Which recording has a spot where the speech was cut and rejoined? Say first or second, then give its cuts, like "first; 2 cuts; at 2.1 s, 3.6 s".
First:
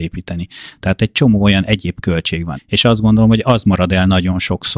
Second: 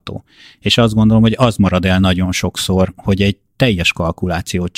first; 1 cut; at 2.6 s